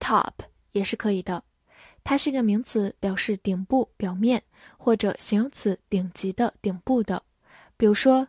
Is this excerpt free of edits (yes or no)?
yes